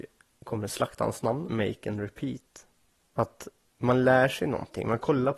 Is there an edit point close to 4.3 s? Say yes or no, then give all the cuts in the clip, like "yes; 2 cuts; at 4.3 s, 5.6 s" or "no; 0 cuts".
no; 2 cuts; at 1.5 s, 3.1 s